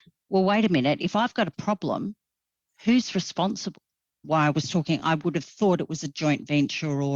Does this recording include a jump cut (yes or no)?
no